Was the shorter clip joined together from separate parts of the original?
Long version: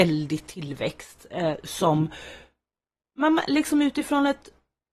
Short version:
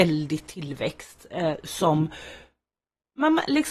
no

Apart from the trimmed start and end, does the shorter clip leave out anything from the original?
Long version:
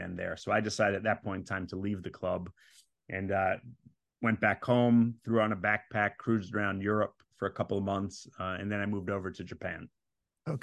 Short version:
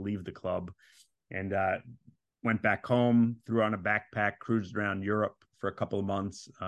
no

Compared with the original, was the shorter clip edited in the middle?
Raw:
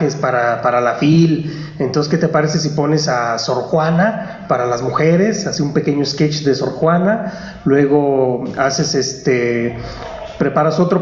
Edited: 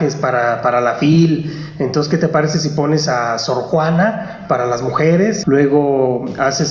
yes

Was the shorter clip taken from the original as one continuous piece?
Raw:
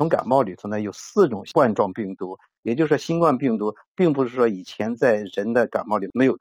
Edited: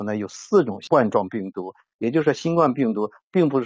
yes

